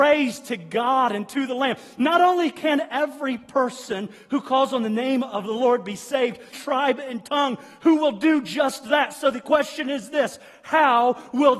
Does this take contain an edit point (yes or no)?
yes